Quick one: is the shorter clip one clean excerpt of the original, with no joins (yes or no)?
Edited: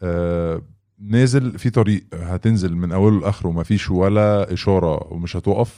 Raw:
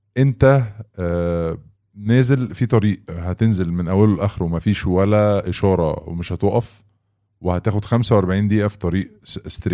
yes